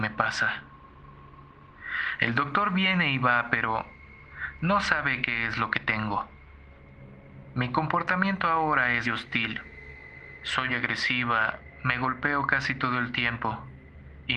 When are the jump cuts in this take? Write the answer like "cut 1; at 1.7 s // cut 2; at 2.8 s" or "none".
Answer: cut 1; at 9.0 s // cut 2; at 10.7 s